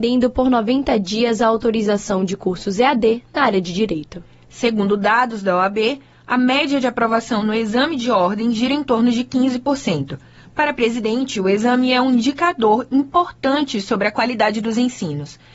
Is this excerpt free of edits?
yes; 0 cuts

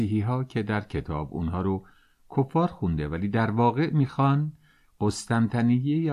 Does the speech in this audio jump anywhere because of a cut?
no; 0 cuts

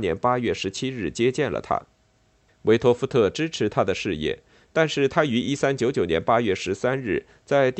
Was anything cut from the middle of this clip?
yes; 1 cut; at 2.5 s

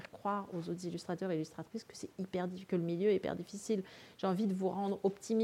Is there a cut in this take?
no; 0 cuts

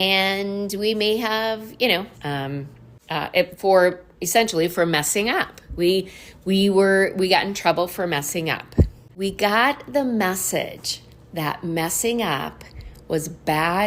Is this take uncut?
no; 2 cuts; at 2.2 s, 9.1 s

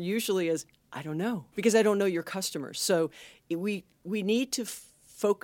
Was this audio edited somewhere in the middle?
yes; 1 cut; at 1.5 s

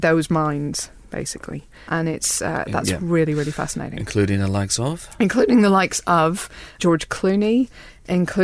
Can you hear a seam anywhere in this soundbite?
no; 0 cuts

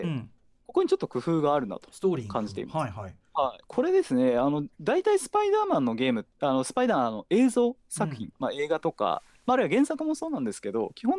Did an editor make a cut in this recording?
yes; 1 cut; at 3.6 s

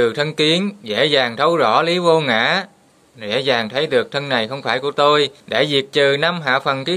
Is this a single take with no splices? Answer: no; 1 cut; at 5.4 s

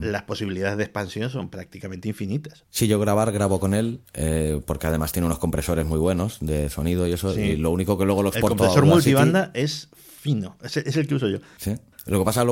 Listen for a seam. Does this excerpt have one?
no; 0 cuts

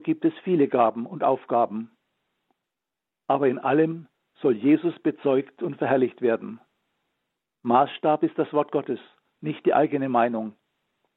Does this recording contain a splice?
no; 0 cuts

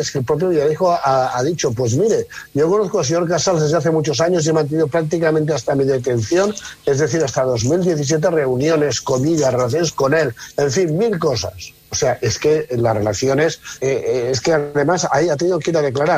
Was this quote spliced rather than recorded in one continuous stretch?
yes; 2 cuts; at 11.8 s, 13.8 s

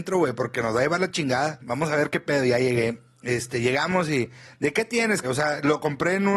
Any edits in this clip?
yes; 2 cuts; at 1.6 s, 5.2 s

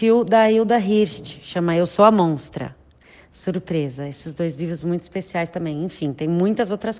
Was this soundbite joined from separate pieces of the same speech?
no; 0 cuts

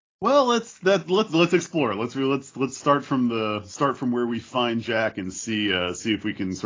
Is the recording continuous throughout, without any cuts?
yes; 0 cuts

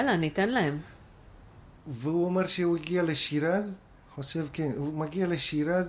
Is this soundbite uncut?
yes; 0 cuts

